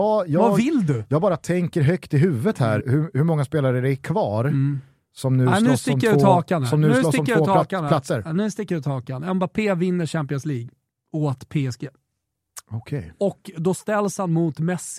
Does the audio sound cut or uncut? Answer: cut